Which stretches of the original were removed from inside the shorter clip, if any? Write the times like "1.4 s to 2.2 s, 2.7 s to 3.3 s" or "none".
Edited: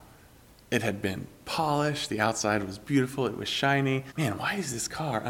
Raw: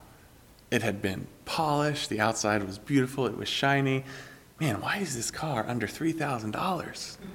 4.1 s to 4.5 s